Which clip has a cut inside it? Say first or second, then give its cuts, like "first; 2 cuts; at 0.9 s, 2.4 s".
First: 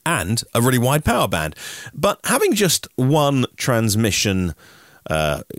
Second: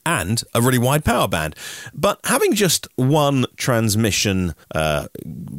second; 1 cut; at 4.6 s